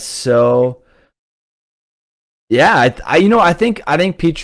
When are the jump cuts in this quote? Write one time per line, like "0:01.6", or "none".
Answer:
none